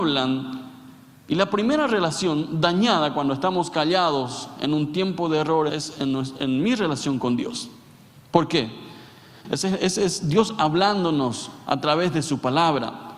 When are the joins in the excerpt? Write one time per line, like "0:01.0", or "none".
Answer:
0:05.7
0:09.4